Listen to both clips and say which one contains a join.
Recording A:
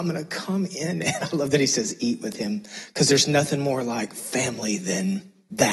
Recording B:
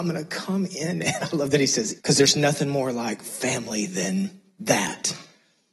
B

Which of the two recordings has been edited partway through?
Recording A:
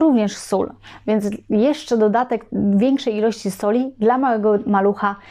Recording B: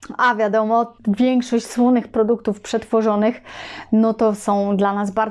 B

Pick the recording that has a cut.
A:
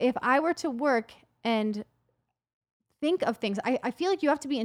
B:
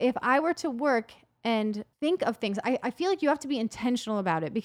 B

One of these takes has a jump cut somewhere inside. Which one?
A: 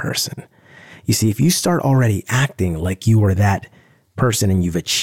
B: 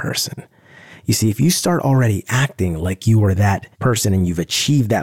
B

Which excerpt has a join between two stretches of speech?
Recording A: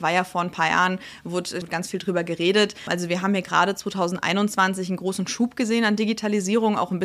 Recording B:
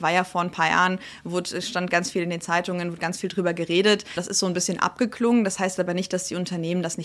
A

